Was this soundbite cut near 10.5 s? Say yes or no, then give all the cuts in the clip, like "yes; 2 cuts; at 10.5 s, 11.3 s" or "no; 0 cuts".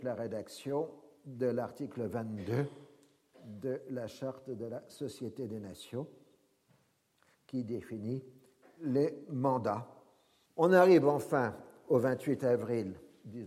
yes; 1 cut; at 10.5 s